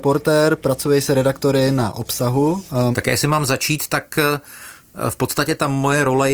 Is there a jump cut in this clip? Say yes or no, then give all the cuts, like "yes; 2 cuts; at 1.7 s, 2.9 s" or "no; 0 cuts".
yes; 1 cut; at 2.9 s